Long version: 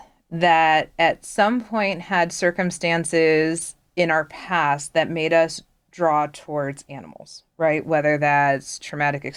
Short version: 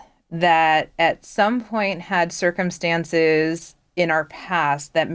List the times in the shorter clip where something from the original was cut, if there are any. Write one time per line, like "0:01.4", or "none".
none